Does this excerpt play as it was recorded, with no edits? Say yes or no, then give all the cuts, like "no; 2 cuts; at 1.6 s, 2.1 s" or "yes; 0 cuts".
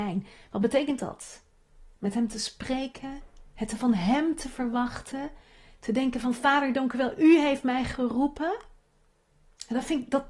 yes; 0 cuts